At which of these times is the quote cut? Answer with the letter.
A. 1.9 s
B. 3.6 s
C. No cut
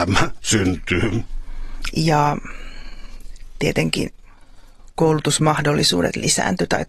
A